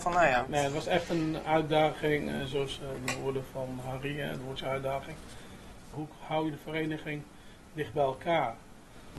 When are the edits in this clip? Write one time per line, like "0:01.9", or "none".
0:05.9